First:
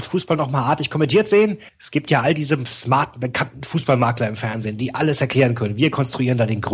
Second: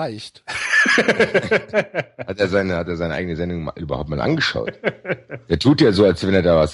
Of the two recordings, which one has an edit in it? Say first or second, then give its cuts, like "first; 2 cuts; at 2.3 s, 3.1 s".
first; 1 cut; at 1.7 s